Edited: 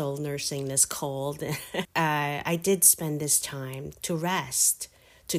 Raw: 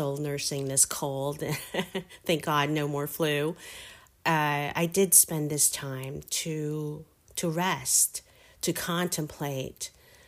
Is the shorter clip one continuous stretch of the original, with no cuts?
no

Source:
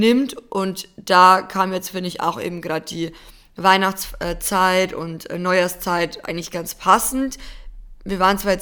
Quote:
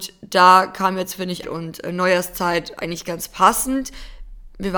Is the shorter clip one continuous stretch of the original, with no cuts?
no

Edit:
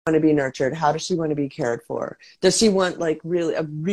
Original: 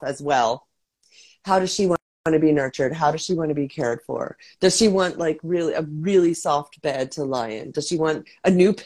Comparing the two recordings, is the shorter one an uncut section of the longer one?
yes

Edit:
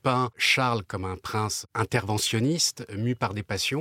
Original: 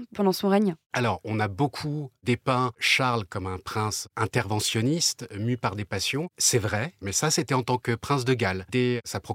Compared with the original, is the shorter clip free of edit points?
yes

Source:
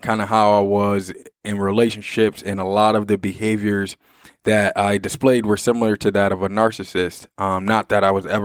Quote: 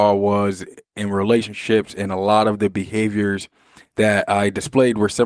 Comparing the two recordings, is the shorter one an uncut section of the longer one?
yes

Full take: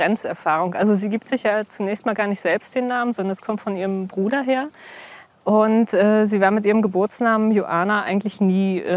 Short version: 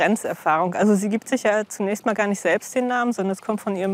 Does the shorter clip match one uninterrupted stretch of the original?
yes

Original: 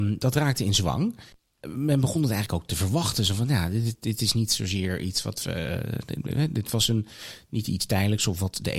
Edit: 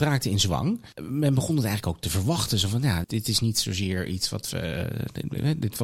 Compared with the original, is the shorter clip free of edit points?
no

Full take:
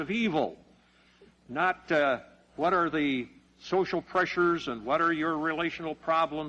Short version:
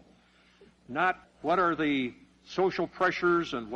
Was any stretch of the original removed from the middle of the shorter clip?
yes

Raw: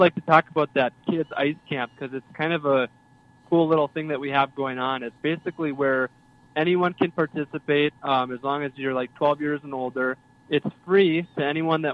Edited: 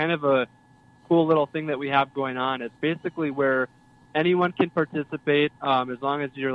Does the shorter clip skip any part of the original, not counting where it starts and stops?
no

